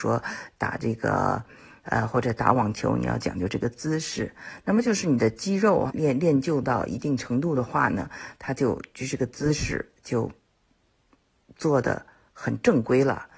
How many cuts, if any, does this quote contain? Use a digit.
2